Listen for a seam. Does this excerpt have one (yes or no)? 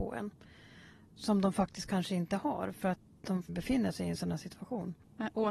yes